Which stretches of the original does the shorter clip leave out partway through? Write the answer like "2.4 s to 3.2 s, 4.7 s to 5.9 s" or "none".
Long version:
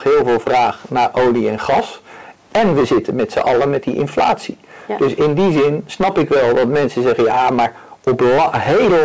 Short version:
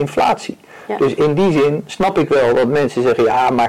none

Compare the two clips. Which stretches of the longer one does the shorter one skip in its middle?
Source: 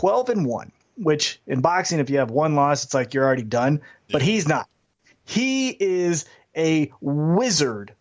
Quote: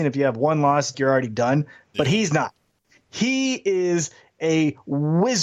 2.9 s to 3.1 s

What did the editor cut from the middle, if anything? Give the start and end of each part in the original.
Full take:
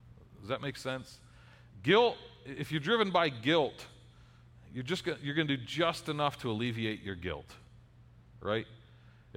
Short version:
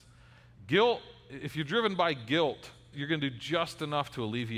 4.1 s to 5.2 s

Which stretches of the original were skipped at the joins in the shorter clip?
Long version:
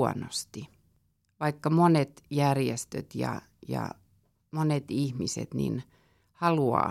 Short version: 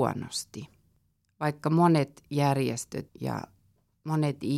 3.1 s to 3.6 s

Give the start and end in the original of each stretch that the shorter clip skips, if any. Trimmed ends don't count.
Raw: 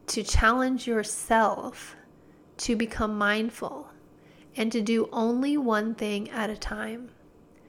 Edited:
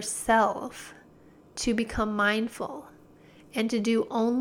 none

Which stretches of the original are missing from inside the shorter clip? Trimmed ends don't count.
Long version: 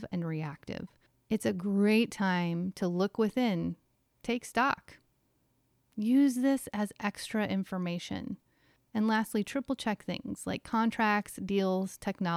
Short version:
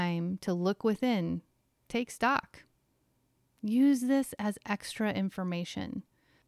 none

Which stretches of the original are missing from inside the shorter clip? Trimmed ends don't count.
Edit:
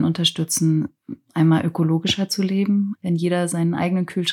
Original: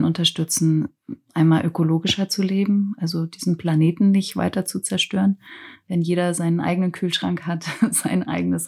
2.9 s to 5.8 s

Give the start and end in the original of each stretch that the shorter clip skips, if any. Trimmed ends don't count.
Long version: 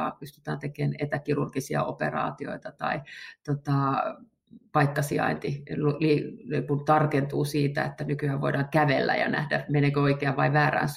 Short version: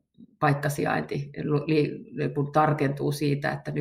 none

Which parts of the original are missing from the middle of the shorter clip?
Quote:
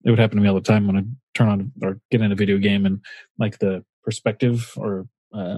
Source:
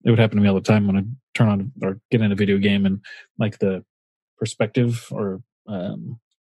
3.9 s to 4.3 s

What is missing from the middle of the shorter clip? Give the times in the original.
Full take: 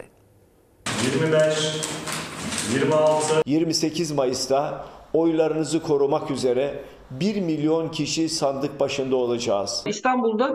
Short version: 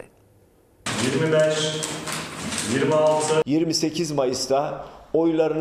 none

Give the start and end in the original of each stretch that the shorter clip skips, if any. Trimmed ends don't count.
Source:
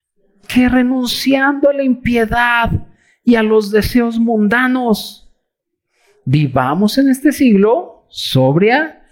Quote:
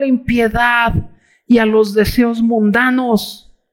none

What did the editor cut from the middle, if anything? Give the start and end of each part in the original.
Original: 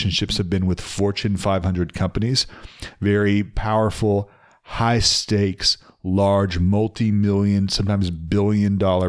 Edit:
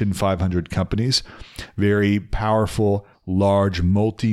4.4 s to 5.9 s

